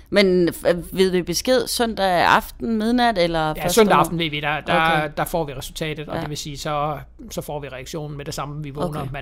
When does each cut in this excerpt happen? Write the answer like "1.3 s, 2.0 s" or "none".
none